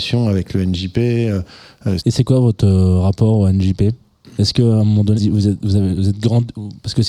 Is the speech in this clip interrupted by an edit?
yes; 2 cuts; at 2.0 s, 5.2 s

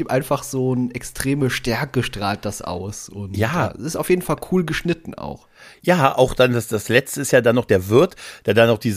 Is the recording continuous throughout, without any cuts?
yes; 0 cuts

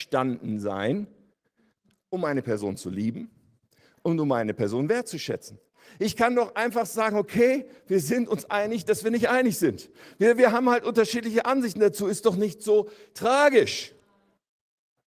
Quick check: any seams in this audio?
no; 0 cuts

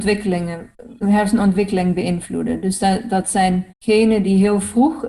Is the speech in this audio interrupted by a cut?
yes; 2 cuts; at 1.0 s, 3.7 s

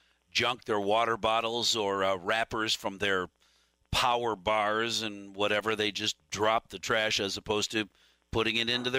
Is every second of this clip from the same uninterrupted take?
yes; 0 cuts

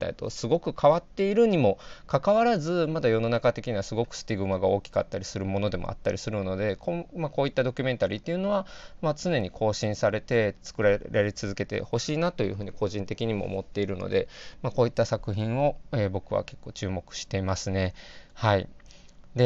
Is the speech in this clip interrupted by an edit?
no; 0 cuts

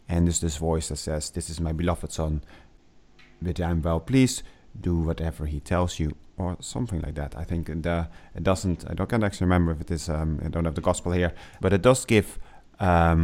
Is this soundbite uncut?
no; 1 cut; at 11.6 s

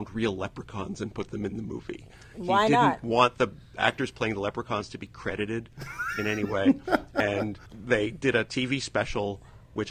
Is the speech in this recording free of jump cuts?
no; 1 cut; at 7.7 s

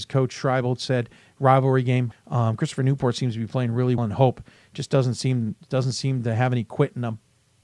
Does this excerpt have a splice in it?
yes; 2 cuts; at 2.1 s, 4.0 s

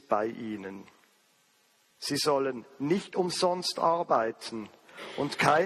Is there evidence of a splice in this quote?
yes; 1 cut; at 1.9 s

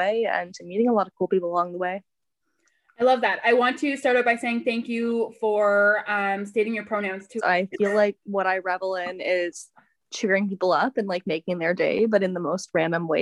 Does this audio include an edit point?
yes; 1 cut; at 7.4 s

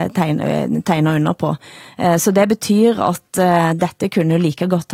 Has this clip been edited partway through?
no; 0 cuts

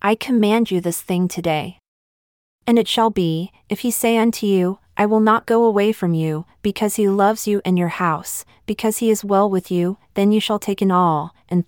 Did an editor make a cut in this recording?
no; 0 cuts

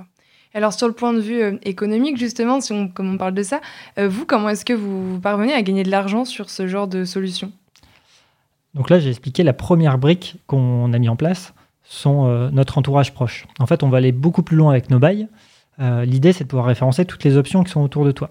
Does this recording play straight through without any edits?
yes; 0 cuts

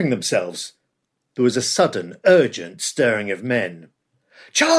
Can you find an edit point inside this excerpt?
no; 0 cuts

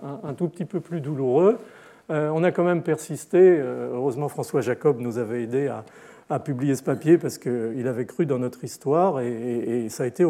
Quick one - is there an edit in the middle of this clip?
no; 0 cuts

